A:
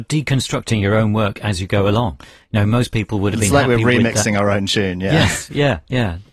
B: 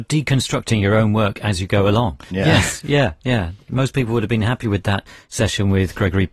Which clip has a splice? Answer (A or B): B